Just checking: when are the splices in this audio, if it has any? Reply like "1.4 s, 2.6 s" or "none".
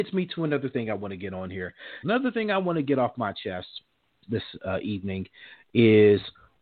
2.0 s, 4.2 s